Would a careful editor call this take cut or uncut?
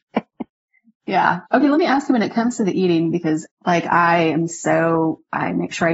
cut